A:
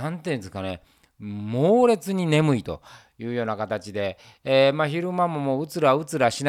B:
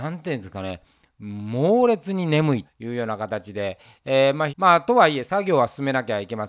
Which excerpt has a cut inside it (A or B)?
B